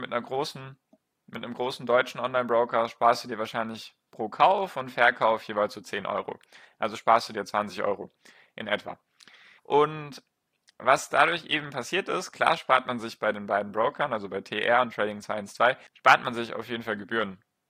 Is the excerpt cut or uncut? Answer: cut